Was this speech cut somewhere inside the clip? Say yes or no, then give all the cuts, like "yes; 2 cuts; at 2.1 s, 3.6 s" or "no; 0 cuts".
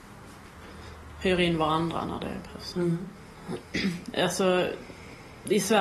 yes; 1 cut; at 2.7 s